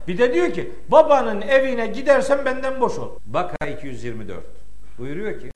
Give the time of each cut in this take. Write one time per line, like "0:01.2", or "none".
0:03.2